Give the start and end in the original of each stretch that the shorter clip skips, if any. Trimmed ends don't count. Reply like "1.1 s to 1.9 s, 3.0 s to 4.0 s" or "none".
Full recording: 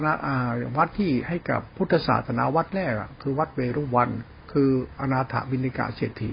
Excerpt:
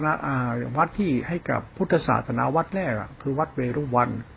none